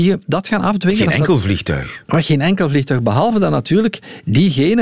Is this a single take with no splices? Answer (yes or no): yes